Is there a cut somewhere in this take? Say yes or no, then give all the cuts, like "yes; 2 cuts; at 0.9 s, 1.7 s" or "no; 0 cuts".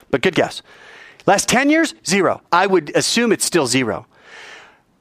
yes; 1 cut; at 2.4 s